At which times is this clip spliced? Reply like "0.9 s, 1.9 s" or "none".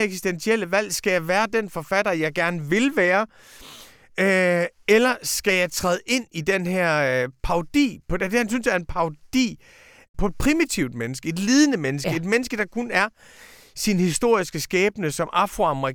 none